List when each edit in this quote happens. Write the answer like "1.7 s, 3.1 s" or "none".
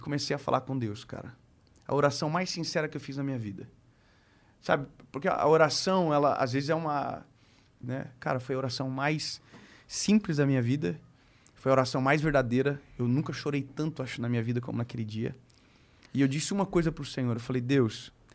7.8 s